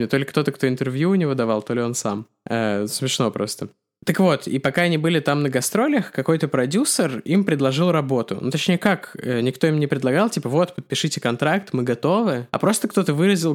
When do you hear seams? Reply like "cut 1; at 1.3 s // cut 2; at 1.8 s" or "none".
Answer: none